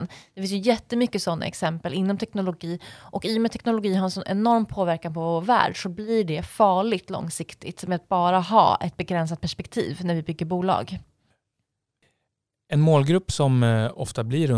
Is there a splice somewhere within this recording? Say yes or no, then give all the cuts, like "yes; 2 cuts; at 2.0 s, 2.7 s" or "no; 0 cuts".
no; 0 cuts